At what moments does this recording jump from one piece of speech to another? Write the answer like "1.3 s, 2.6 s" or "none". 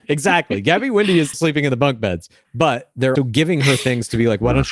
1.3 s, 3.2 s